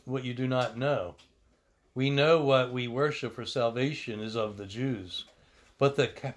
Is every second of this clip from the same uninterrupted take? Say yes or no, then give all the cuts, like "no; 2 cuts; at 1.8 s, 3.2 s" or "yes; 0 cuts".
yes; 0 cuts